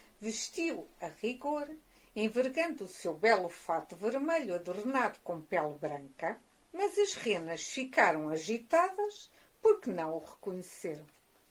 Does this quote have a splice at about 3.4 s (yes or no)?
no